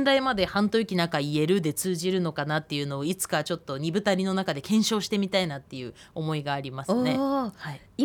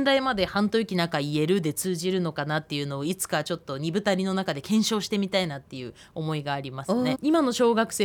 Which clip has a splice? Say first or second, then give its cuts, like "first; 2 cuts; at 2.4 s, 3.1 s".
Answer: second; 1 cut; at 7.1 s